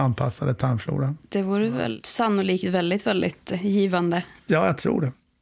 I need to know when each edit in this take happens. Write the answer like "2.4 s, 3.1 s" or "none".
none